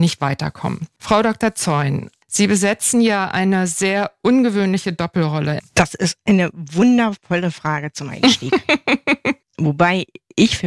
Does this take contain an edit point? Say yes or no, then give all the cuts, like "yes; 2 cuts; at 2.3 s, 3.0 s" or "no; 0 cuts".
yes; 2 cuts; at 5.6 s, 9.4 s